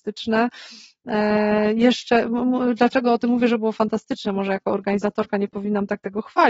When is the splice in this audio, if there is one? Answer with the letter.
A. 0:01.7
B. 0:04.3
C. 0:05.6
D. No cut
D